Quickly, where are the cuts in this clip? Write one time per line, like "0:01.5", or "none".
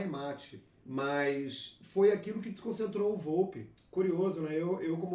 none